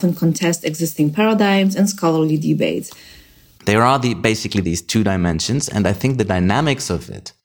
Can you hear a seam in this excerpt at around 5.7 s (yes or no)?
no